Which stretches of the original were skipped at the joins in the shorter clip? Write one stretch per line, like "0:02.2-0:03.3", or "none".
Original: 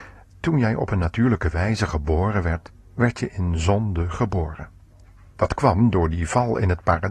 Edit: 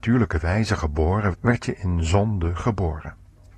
0:02.4-0:02.9